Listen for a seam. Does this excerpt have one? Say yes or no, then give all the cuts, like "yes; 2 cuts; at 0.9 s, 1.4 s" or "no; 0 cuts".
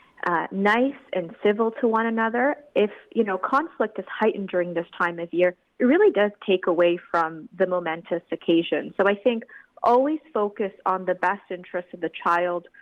no; 0 cuts